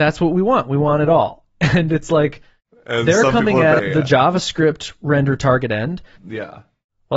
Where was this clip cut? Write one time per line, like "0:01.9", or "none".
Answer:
0:03.8
0:06.2